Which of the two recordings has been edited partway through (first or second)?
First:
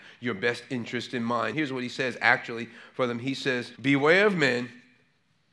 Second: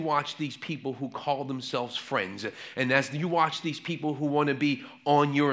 first